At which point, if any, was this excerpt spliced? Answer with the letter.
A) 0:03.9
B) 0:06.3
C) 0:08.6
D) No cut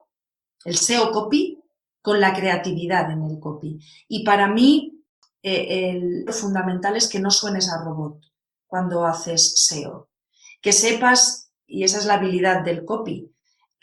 B